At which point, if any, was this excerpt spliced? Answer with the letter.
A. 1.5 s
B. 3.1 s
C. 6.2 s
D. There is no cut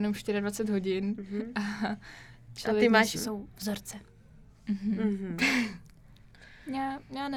B